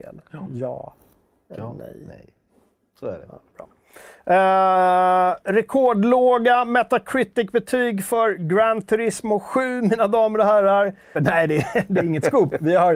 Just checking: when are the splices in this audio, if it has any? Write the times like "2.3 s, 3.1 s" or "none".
11.1 s